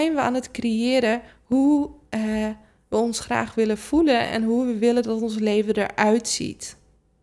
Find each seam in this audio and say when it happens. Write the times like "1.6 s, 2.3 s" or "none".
none